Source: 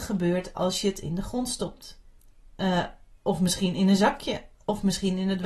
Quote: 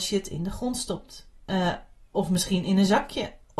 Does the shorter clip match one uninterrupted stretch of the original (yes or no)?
no